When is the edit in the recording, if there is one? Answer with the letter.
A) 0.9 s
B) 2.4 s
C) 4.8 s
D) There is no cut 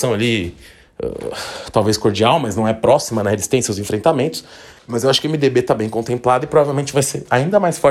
C